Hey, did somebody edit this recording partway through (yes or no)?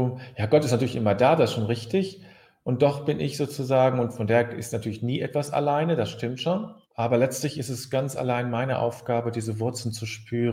yes